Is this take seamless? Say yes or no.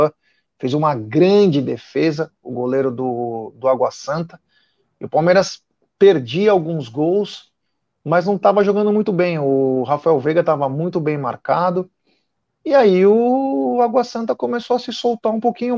yes